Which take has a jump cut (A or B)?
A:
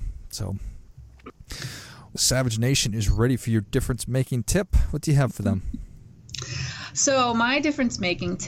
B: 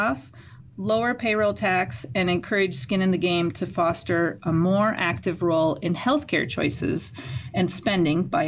A